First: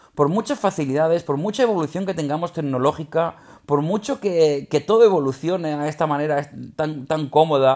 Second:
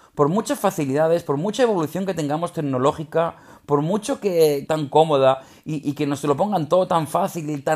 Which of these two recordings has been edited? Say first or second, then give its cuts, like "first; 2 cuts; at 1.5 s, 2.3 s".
second; 1 cut; at 4.7 s